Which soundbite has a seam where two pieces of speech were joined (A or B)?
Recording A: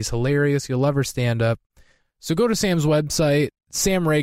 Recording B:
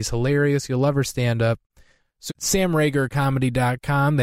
B